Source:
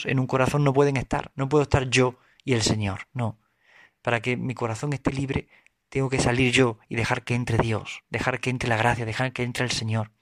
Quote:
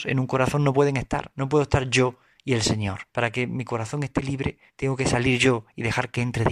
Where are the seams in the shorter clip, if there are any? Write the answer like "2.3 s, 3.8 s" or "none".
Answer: 3.1 s, 4.7 s